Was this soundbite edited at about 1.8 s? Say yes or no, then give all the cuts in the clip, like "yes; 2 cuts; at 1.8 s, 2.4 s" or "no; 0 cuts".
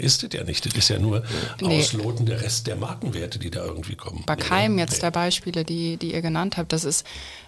no; 1 cut; at 4.3 s